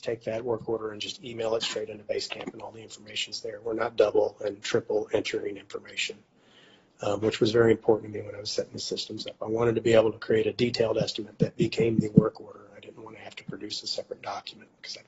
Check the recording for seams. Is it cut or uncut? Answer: uncut